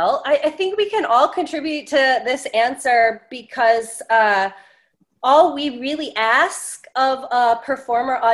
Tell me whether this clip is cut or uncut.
uncut